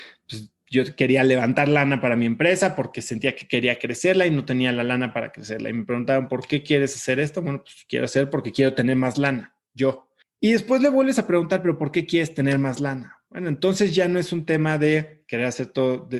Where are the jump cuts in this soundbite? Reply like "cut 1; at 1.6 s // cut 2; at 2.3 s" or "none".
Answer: cut 1; at 10.2 s // cut 2; at 13.3 s